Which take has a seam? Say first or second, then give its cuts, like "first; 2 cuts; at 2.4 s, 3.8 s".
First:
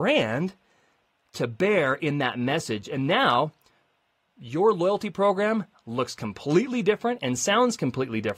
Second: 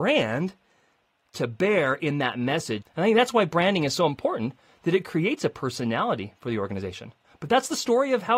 second; 1 cut; at 2.8 s